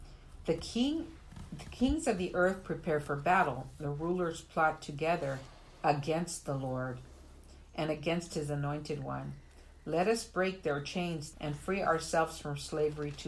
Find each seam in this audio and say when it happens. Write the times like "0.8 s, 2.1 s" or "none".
11.3 s

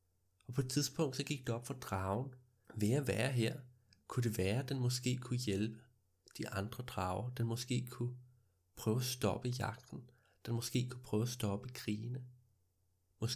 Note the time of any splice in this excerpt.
none

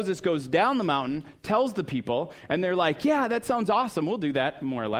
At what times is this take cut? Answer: none

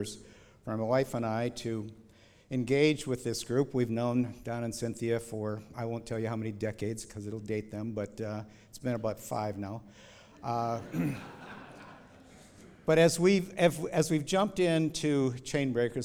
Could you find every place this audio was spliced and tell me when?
none

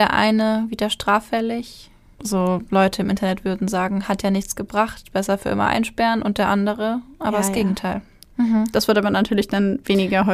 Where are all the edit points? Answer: 2.2 s, 8.3 s

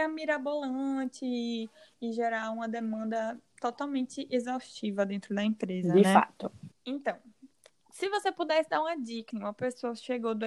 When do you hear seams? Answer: 6.7 s, 9.3 s

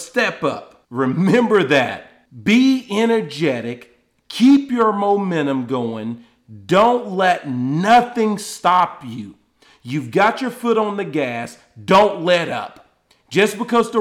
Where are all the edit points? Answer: none

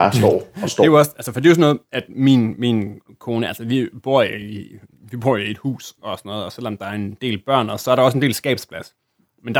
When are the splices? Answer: none

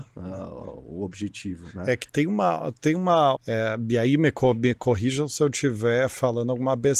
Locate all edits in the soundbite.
2.1 s, 3.4 s

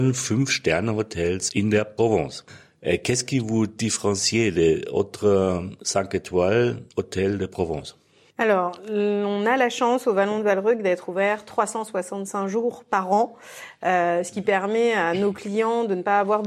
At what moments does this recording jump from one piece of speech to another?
none

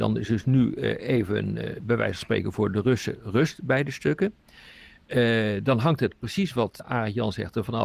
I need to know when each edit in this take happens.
6.8 s

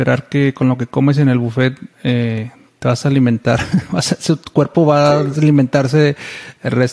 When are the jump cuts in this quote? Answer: 1.9 s

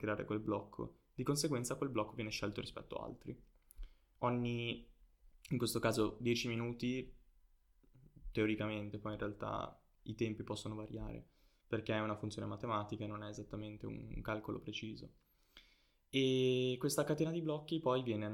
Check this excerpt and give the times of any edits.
none

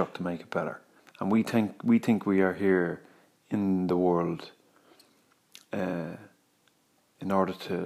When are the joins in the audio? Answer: 1.0 s

